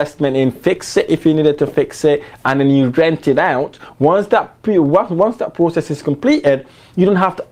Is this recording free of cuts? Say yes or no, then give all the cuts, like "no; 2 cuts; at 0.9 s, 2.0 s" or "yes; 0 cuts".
yes; 0 cuts